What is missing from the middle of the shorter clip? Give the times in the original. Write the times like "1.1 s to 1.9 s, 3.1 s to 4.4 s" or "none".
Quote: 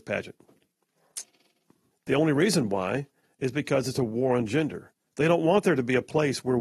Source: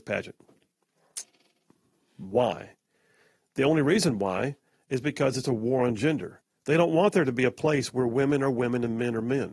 1.9 s to 3.4 s